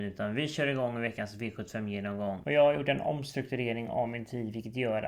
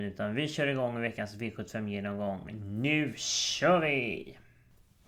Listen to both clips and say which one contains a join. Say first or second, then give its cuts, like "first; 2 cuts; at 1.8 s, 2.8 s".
first; 1 cut; at 2.4 s